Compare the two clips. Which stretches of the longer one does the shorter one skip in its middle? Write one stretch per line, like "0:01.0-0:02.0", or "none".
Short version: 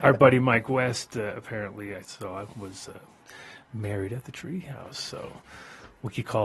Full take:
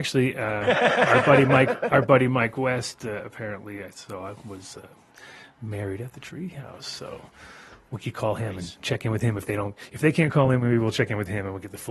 none